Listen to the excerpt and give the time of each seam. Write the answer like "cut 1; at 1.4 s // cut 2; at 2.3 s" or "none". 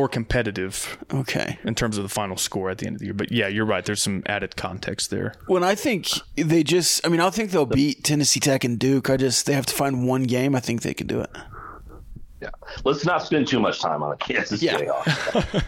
none